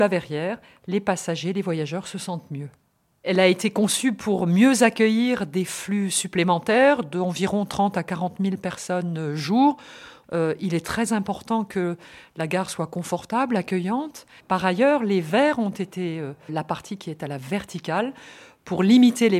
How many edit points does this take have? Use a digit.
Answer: 3